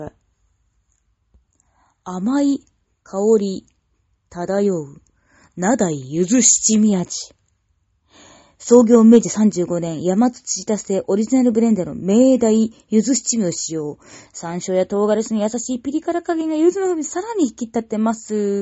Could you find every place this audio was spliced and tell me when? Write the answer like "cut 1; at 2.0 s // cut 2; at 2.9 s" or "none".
cut 1; at 14.3 s